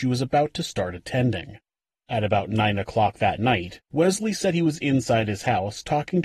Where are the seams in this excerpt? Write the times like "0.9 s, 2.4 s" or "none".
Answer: none